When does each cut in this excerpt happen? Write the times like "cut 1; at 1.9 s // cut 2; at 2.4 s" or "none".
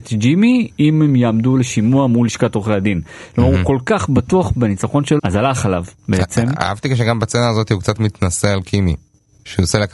cut 1; at 5.2 s